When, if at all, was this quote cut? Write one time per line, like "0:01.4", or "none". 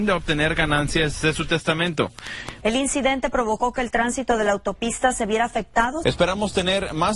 0:02.6
0:06.0